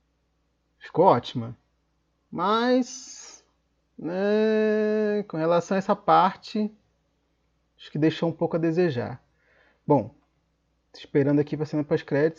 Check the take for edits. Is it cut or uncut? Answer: uncut